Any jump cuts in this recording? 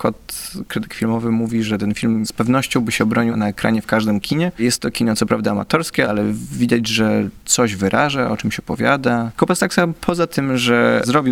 yes; 1 cut; at 9.3 s

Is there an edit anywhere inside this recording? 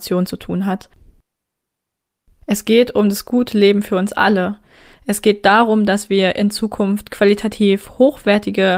no; 0 cuts

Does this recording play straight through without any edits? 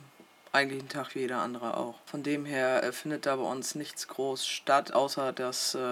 yes; 0 cuts

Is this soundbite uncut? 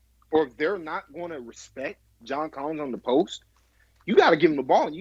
yes; 0 cuts

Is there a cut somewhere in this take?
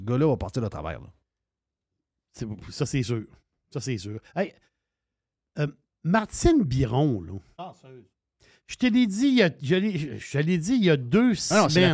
no; 0 cuts

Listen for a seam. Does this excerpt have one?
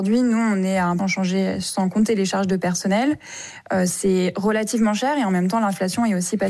yes; 1 cut; at 1.0 s

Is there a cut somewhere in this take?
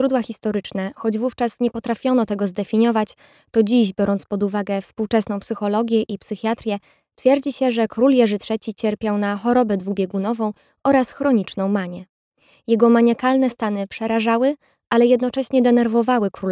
no; 0 cuts

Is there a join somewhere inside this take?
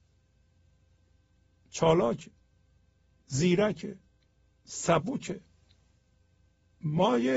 no; 0 cuts

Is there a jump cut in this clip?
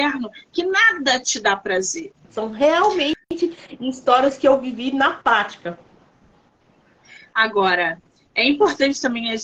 yes; 1 cut; at 2.2 s

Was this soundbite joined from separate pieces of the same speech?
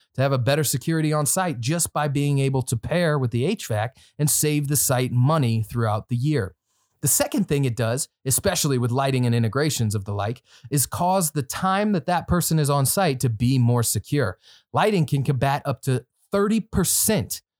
no; 0 cuts

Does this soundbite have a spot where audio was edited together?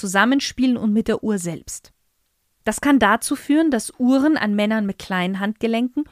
yes; 1 cut; at 2.5 s

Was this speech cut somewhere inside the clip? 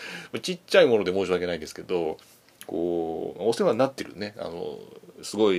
no; 0 cuts

